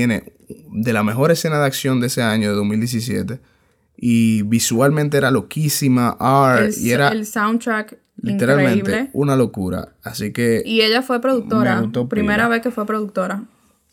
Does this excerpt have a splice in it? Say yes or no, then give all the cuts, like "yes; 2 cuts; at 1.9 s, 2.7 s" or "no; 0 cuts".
no; 0 cuts